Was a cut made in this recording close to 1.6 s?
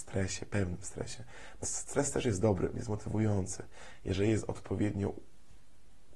yes; 1 cut; at 1.6 s

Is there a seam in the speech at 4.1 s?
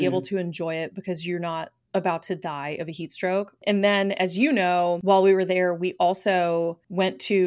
no; 0 cuts

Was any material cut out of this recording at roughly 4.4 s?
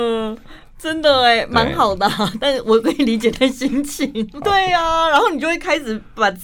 yes; 1 cut; at 4.4 s

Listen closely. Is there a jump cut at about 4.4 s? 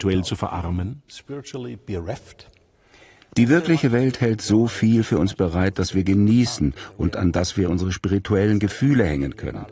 no; 0 cuts

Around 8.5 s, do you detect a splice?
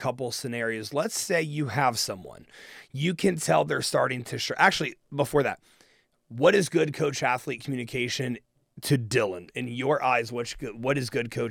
no; 0 cuts

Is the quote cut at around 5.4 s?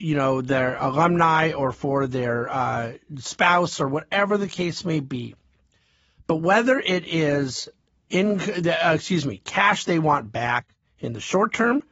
no; 0 cuts

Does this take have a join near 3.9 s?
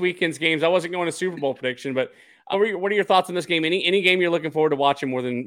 no; 1 cut; at 2.5 s

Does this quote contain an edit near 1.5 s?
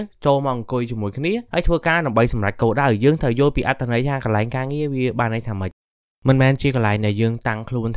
yes; 1 cut; at 1.5 s

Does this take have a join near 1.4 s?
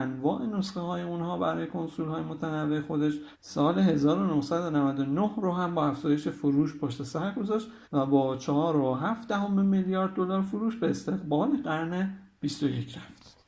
no; 2 cuts; at 3.3 s, 7.8 s

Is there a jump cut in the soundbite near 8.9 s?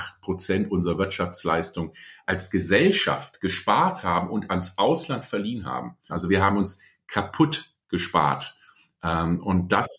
no; 1 cut; at 6.1 s

